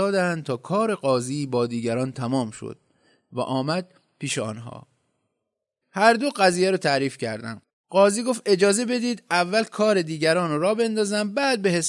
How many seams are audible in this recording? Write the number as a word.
one